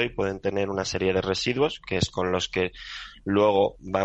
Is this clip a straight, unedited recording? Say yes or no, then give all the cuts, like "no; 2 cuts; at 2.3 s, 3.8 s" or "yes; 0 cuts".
yes; 0 cuts